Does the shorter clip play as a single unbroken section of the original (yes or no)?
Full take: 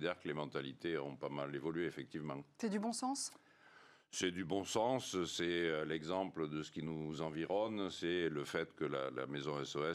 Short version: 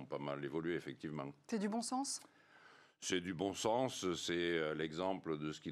yes